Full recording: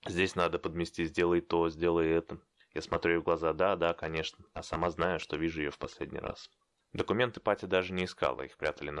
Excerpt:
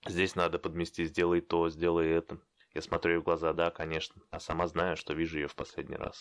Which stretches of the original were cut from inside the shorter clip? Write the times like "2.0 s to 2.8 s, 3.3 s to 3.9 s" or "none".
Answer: 3.5 s to 3.8 s

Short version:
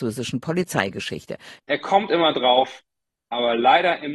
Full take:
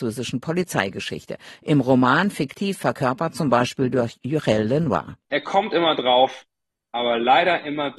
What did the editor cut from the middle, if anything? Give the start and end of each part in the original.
1.6 s to 5.2 s

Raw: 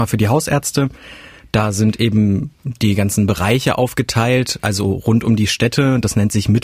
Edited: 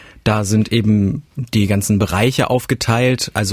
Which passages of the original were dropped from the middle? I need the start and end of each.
none

